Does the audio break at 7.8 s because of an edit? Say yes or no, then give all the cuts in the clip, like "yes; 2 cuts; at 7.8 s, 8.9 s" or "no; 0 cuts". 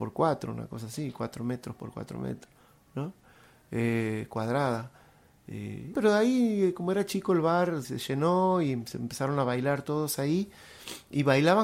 yes; 2 cuts; at 5.9 s, 7.8 s